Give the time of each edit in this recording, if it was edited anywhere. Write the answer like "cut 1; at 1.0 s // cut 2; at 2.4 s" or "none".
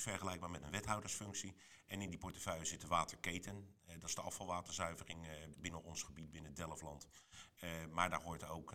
cut 1; at 5.5 s